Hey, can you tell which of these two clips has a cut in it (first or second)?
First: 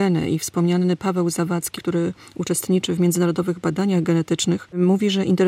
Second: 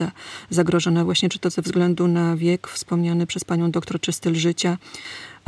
first